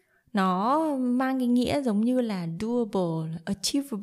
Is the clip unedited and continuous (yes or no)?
yes